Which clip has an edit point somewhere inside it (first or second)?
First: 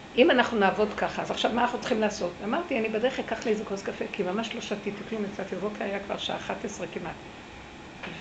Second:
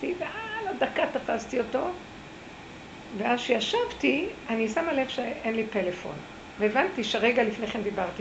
first